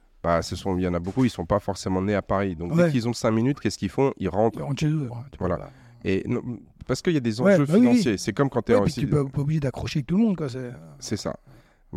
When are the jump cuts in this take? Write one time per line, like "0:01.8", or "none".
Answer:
0:05.1